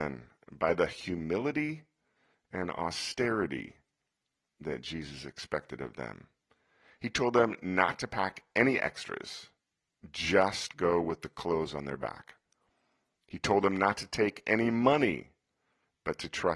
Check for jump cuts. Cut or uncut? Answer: uncut